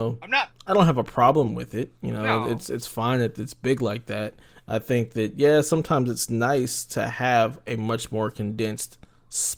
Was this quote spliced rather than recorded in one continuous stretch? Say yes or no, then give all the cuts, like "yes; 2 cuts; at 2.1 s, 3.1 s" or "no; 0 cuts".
no; 0 cuts